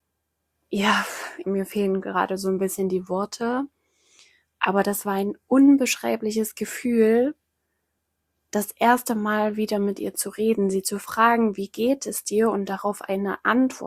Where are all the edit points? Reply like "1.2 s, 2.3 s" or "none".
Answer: 1.4 s

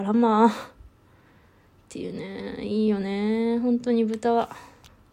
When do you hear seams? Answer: none

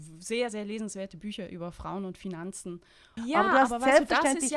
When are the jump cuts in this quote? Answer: 3.2 s

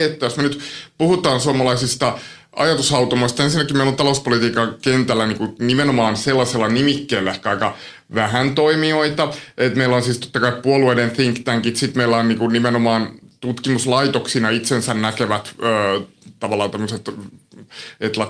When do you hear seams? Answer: none

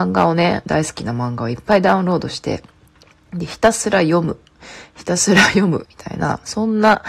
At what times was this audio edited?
5.8 s

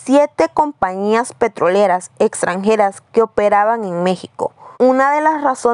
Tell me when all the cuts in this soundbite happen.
4.7 s

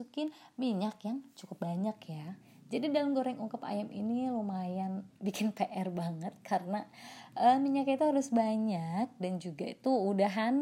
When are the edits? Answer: none

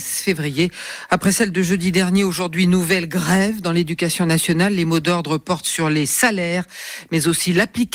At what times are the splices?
1.1 s

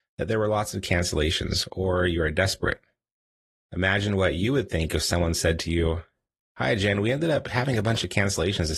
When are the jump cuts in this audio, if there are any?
none

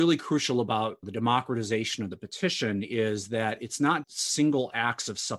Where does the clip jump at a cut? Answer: 4.0 s

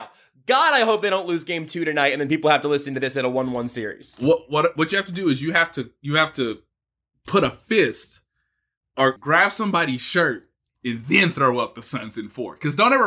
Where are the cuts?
9.2 s

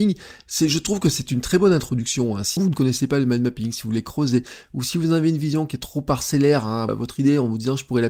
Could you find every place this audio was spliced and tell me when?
2.6 s, 6.9 s

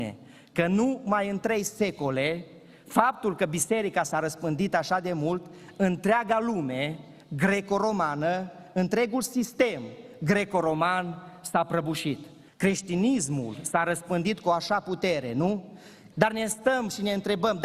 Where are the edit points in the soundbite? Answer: 12.5 s, 16.1 s

